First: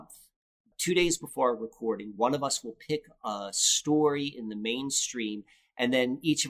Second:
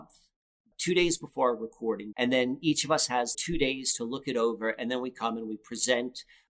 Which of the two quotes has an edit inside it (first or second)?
second